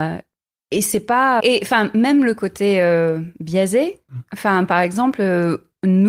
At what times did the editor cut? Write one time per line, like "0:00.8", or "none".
0:01.4